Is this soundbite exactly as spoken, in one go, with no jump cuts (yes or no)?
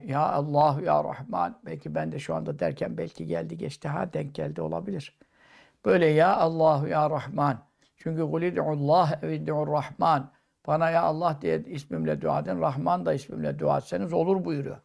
yes